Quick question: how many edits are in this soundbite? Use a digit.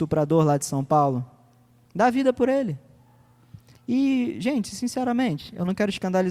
1